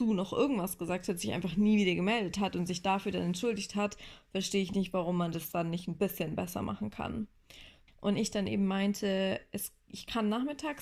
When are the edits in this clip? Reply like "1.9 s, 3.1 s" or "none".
7.9 s